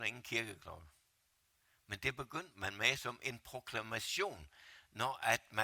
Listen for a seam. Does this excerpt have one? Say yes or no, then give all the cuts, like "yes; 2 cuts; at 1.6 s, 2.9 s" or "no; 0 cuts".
no; 0 cuts